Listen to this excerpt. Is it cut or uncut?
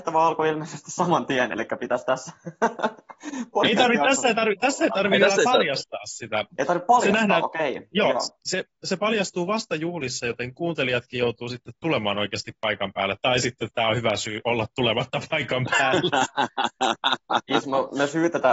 uncut